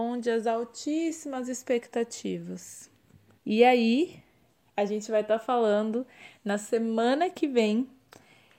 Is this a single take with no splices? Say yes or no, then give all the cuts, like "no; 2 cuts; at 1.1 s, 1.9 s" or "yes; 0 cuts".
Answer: no; 1 cut; at 3.4 s